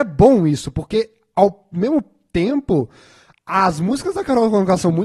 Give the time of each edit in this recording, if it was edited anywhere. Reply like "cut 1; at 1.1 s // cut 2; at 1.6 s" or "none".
none